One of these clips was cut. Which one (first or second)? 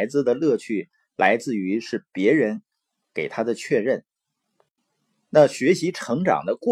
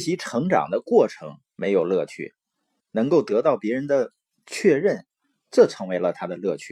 second